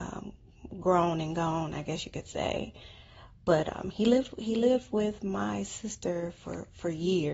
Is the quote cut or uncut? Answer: uncut